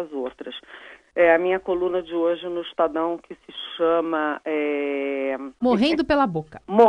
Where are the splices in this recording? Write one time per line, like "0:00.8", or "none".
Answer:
0:05.6